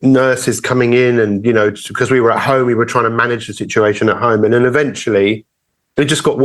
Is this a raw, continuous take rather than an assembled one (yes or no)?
yes